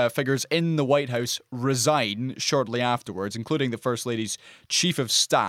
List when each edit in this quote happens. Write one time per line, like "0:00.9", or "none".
none